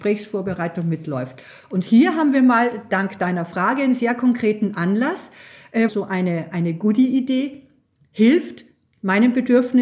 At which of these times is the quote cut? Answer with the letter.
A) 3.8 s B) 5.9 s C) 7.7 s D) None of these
B